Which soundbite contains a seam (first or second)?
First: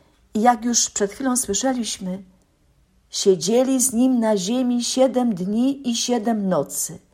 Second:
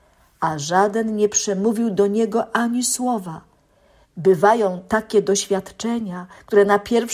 second